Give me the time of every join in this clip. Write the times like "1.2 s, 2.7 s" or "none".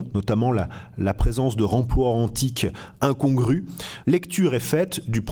4.0 s